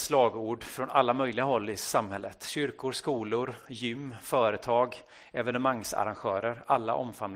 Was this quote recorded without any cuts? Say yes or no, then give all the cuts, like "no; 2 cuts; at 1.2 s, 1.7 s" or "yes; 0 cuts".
yes; 0 cuts